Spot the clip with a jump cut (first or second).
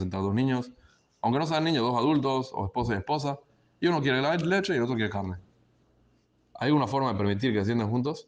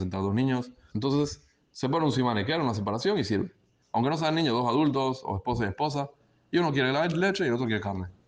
second